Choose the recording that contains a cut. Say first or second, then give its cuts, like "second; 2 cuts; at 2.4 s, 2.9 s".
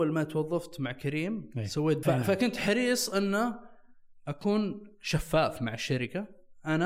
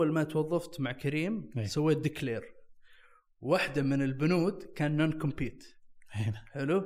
first; 1 cut; at 2.0 s